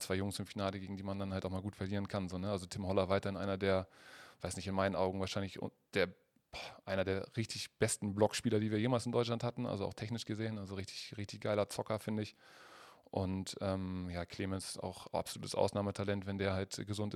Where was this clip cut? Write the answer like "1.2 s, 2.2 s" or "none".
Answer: none